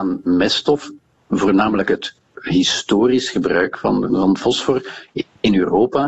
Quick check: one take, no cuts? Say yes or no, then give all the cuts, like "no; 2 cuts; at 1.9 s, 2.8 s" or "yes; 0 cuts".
no; 1 cut; at 4.1 s